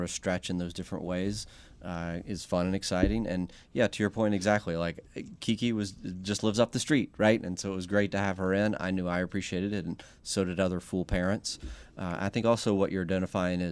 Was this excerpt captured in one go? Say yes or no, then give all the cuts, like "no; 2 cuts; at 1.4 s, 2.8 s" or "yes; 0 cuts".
yes; 0 cuts